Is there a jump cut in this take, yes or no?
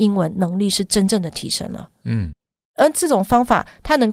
no